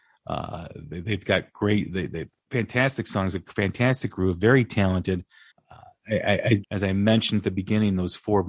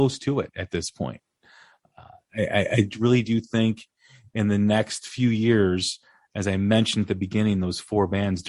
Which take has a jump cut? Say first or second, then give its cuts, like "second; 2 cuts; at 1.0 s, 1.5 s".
first; 2 cuts; at 5.5 s, 6.6 s